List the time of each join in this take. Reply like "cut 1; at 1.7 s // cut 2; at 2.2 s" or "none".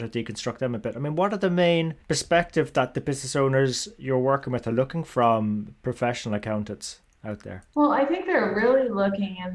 cut 1; at 2.0 s